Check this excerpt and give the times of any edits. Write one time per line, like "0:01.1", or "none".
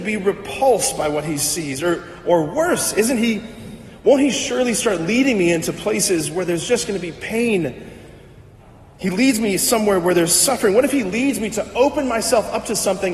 none